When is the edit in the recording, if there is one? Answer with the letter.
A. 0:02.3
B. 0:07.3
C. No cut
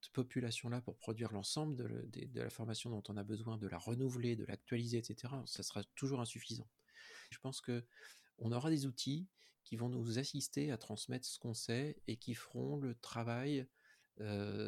B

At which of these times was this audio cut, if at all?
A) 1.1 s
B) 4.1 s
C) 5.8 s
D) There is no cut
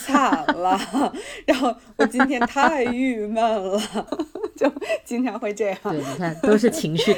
B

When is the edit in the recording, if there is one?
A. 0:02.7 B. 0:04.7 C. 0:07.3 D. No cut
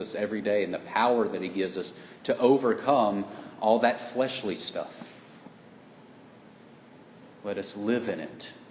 C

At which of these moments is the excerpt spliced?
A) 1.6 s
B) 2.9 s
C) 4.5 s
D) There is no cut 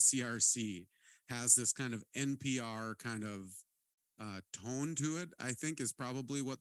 D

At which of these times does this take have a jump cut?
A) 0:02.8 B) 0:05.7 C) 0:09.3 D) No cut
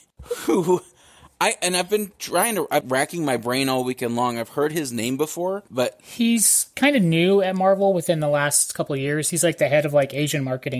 A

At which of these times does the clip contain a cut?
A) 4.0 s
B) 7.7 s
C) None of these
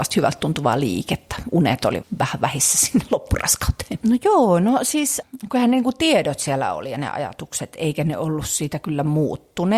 A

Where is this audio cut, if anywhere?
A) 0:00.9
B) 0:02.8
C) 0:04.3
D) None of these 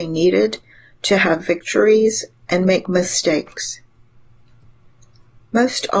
D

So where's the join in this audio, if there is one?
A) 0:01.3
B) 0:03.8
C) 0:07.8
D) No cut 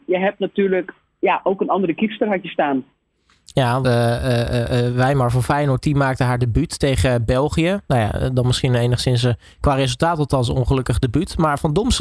B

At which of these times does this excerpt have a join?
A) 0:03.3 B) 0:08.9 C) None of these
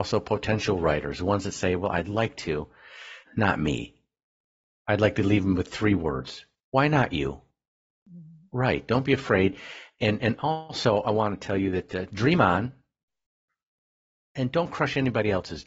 A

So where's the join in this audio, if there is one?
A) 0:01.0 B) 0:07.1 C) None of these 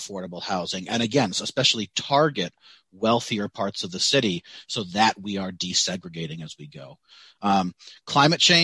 C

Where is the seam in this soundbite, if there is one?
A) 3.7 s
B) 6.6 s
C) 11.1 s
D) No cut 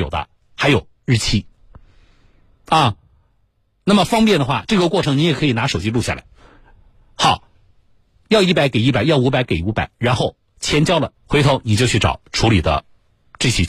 C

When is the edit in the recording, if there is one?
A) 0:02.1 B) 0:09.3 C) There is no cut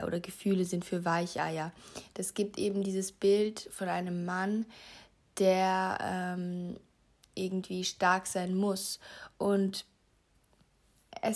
B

